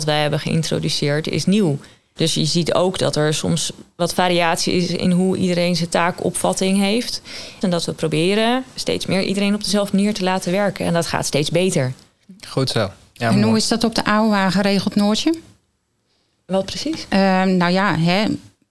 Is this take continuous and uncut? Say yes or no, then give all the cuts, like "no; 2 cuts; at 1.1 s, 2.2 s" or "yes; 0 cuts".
no; 2 cuts; at 2.2 s, 7.6 s